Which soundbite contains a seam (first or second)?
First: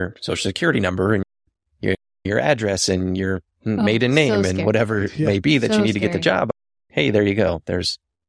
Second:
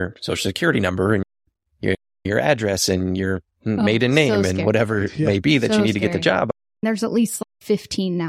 second